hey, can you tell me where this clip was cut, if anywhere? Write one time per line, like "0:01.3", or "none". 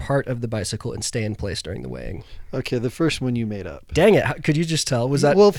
none